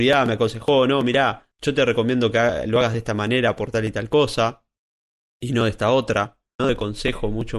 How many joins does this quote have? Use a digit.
1